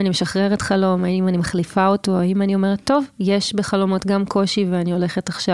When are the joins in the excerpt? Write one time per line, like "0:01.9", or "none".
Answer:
none